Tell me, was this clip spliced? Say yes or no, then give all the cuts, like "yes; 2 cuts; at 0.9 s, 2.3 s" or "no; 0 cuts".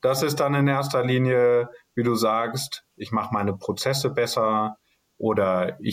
yes; 1 cut; at 2.9 s